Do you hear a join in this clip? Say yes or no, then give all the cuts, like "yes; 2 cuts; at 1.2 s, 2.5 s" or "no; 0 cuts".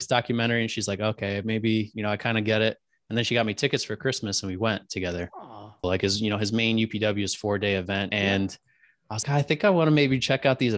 yes; 3 cuts; at 5.8 s, 8.1 s, 9.2 s